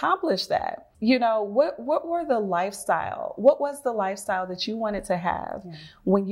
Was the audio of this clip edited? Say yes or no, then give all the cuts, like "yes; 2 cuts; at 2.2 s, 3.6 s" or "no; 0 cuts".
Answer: yes; 1 cut; at 0.9 s